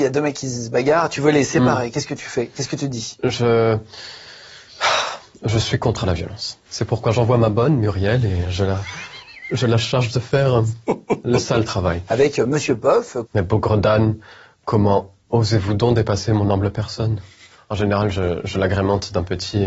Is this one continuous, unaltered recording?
no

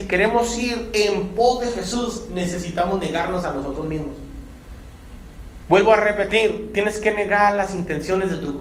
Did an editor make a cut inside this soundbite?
no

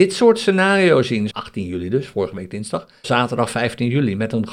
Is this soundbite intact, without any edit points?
no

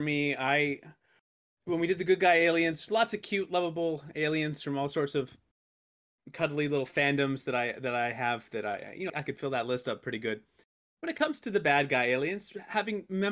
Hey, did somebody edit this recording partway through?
yes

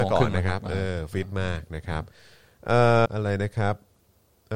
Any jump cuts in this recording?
yes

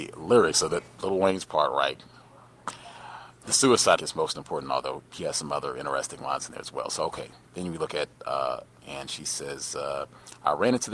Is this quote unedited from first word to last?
no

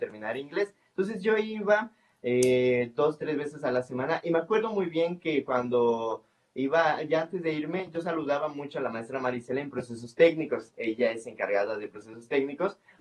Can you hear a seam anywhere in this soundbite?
no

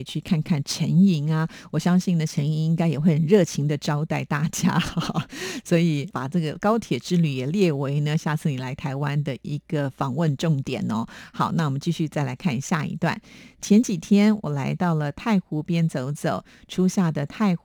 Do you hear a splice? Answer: no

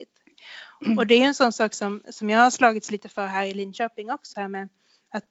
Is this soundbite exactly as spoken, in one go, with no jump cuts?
no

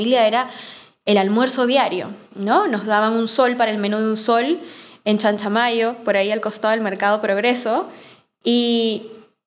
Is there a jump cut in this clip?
no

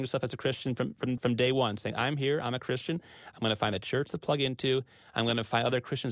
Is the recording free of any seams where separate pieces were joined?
yes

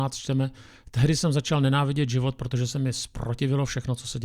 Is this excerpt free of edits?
yes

